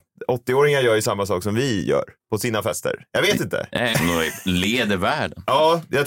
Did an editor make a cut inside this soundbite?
yes; 1 cut; at 3.9 s

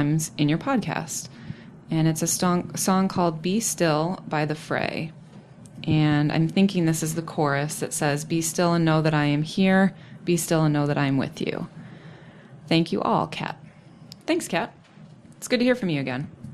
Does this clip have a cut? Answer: no; 0 cuts

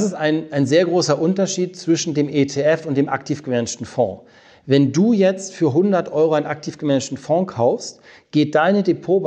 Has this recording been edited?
no; 0 cuts

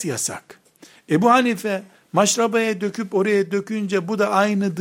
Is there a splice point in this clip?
no; 0 cuts

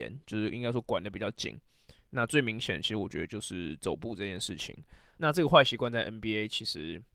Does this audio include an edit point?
yes; 1 cut; at 5.2 s

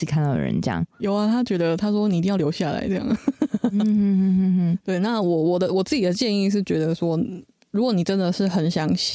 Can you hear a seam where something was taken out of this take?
yes; 1 cut; at 3.5 s

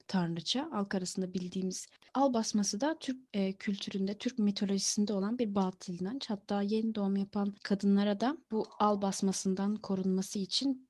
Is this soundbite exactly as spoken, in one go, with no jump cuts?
no; 1 cut; at 7.6 s

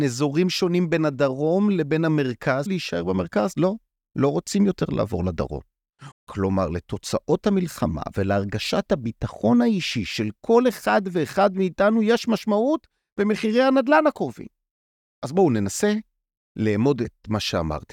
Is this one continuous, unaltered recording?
no; 2 cuts; at 2.7 s, 6.1 s

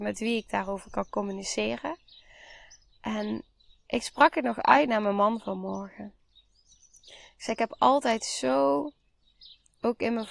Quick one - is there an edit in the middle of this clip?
no; 0 cuts

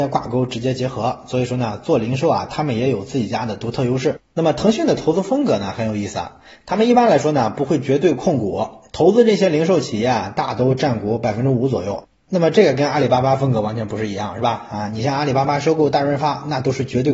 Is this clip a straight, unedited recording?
no; 1 cut; at 4.2 s

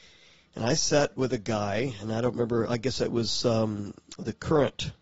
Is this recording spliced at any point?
no; 0 cuts

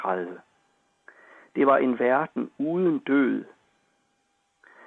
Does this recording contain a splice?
no; 0 cuts

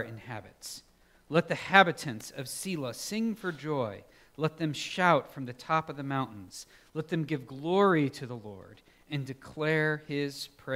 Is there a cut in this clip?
no; 0 cuts

